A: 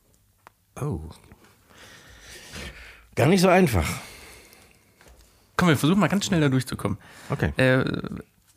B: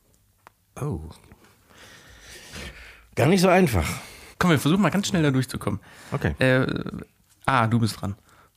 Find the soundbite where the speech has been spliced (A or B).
B